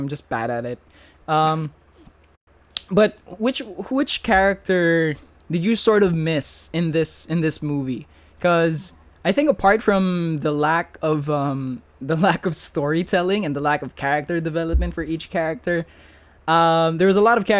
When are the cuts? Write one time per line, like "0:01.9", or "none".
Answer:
none